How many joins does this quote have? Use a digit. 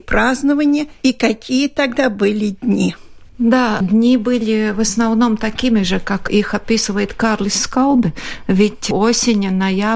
1